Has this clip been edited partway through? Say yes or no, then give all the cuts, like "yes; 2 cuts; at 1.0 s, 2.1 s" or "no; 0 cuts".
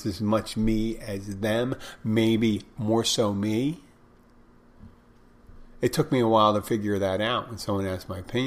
no; 0 cuts